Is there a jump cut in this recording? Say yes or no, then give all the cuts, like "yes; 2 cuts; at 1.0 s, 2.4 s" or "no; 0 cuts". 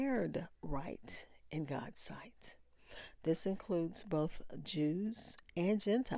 no; 0 cuts